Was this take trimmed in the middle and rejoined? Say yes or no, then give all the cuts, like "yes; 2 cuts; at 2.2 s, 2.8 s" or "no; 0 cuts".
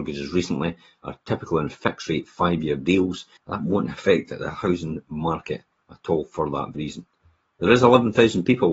yes; 2 cuts; at 3.4 s, 6.7 s